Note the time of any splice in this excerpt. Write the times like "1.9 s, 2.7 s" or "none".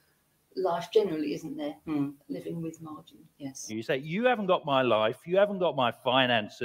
3.7 s